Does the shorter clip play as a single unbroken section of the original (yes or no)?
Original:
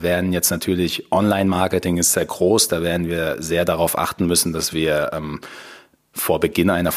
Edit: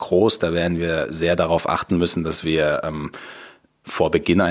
yes